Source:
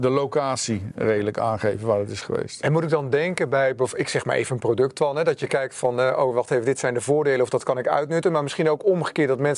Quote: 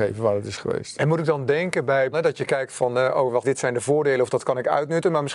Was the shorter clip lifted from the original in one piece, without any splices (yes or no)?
no